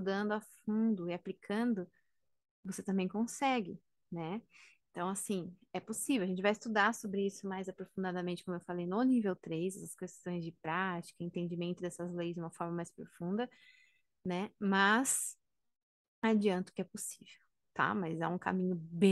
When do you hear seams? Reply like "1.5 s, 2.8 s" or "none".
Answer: none